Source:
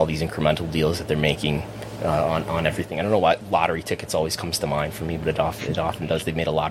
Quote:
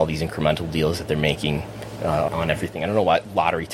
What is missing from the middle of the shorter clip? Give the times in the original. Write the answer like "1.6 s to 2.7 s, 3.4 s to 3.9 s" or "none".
2.3 s to 2.4 s